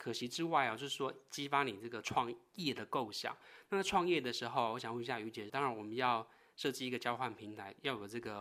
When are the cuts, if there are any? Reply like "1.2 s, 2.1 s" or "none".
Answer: 5.5 s